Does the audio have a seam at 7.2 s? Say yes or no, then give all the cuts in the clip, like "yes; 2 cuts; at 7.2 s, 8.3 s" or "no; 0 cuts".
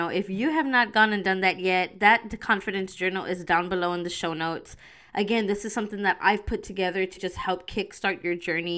yes; 1 cut; at 7.2 s